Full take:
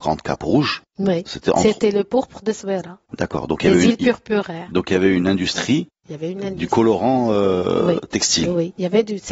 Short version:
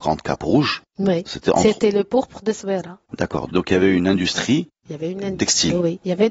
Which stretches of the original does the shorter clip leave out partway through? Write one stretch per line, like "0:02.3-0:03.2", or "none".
0:03.5-0:04.7
0:06.6-0:08.1